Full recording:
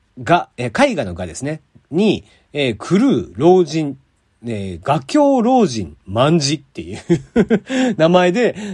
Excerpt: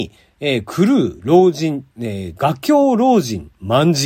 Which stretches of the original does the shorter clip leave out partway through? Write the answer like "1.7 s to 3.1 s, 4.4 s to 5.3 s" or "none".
4.0 s to 4.4 s